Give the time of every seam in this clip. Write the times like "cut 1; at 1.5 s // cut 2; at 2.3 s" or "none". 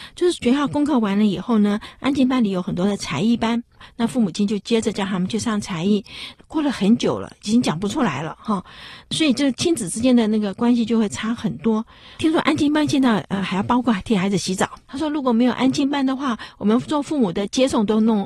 cut 1; at 6.4 s // cut 2; at 12.2 s // cut 3; at 14.8 s